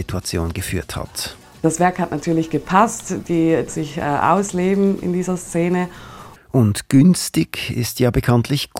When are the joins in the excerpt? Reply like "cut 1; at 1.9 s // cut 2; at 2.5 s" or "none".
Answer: cut 1; at 3.7 s // cut 2; at 6.4 s